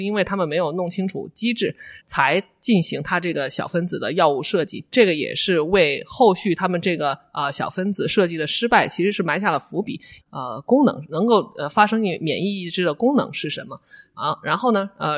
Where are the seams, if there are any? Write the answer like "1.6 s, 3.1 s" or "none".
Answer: 2.0 s, 10.2 s